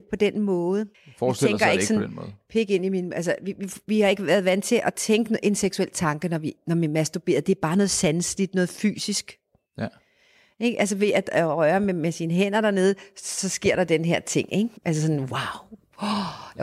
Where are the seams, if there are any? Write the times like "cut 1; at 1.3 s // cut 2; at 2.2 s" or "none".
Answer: cut 1; at 0.9 s // cut 2; at 14.8 s